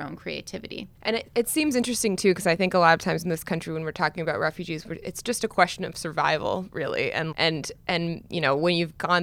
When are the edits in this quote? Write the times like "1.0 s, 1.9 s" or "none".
0.9 s, 7.3 s